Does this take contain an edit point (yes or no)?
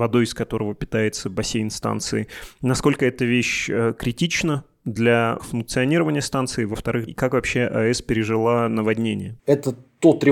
yes